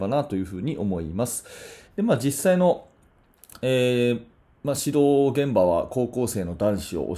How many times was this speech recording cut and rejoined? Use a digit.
1